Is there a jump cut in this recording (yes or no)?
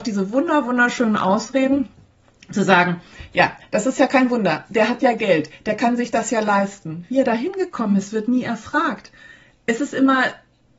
no